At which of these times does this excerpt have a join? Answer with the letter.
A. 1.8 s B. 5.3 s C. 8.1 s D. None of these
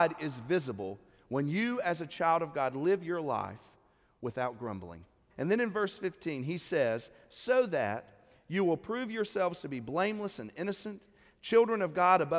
B